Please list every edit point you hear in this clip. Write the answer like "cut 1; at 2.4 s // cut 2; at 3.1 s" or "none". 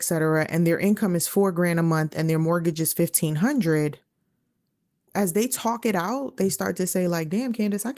cut 1; at 5.1 s